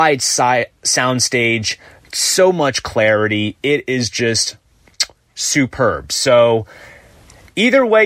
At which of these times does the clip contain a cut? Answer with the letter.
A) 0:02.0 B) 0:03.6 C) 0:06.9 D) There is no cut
D